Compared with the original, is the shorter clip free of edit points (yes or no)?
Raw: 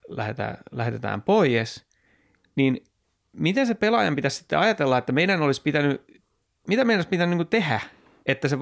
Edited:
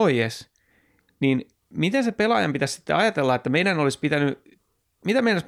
no